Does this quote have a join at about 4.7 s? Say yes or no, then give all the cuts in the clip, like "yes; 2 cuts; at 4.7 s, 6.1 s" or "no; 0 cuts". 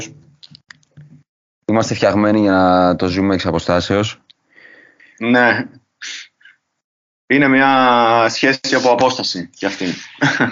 no; 0 cuts